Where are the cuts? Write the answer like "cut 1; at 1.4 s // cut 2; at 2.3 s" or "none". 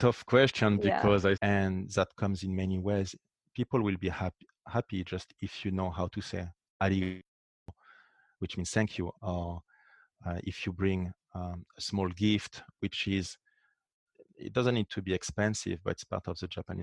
cut 1; at 1.3 s // cut 2; at 9.1 s